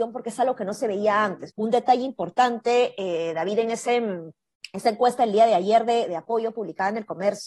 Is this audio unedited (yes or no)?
no